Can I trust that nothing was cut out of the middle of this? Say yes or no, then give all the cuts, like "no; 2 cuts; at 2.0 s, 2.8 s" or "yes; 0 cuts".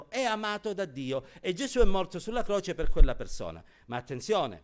yes; 0 cuts